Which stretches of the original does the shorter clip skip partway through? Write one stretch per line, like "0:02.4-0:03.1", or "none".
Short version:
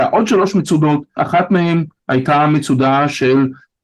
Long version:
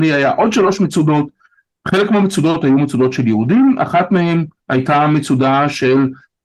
0:01.4-0:03.8